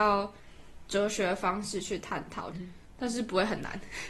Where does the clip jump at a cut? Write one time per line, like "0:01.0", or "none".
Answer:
0:02.5